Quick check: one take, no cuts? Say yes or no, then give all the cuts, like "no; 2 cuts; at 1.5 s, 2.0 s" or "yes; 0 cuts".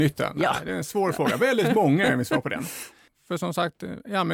no; 1 cut; at 3.1 s